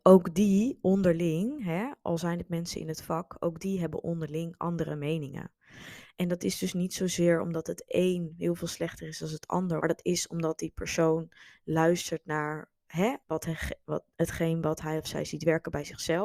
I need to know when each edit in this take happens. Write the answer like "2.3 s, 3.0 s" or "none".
9.8 s, 13.2 s